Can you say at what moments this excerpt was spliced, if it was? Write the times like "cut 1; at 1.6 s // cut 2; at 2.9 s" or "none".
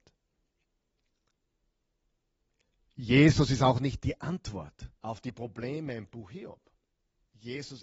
cut 1; at 5.0 s